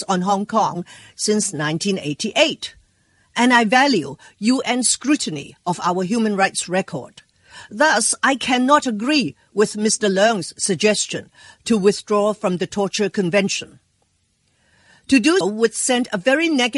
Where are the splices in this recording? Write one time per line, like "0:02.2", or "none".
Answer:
0:15.4